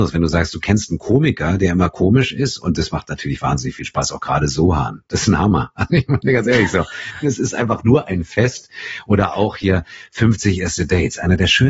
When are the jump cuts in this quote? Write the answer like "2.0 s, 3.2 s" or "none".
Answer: 7.2 s

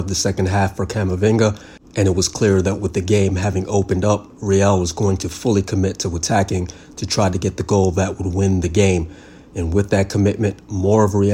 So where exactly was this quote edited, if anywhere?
none

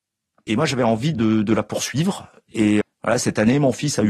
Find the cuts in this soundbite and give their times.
1.1 s, 2.8 s

